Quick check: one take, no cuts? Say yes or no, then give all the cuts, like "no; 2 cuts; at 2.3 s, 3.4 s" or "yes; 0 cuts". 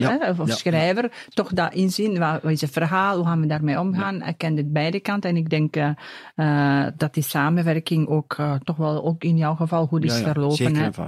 yes; 0 cuts